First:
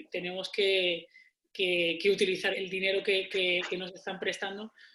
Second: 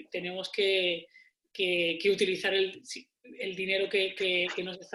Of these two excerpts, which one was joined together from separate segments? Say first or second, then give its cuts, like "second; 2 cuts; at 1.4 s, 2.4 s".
first; 1 cut; at 2.5 s